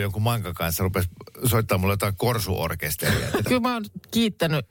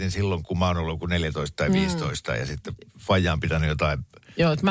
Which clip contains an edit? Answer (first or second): first